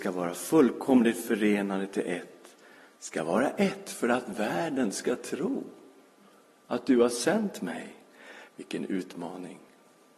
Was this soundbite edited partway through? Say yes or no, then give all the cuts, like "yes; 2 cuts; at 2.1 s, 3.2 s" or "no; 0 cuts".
yes; 2 cuts; at 2.9 s, 8.5 s